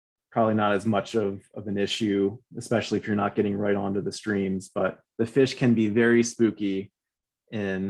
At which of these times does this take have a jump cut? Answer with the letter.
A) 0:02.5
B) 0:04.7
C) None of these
A